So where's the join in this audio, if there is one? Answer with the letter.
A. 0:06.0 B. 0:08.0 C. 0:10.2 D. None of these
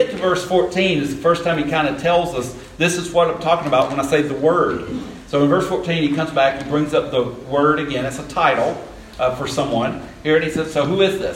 D